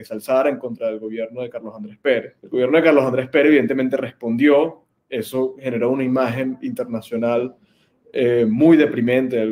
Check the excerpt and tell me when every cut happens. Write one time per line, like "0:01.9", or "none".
0:02.4